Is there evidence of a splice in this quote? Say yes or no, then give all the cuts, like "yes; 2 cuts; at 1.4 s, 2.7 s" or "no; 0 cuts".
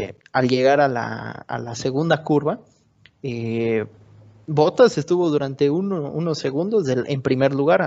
no; 0 cuts